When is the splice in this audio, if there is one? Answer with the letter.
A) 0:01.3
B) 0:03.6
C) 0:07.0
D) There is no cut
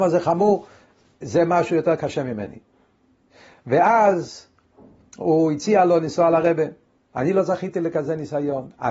C